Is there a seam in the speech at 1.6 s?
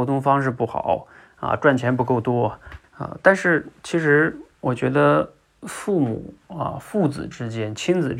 no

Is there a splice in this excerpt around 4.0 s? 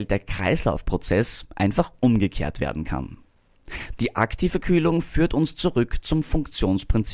yes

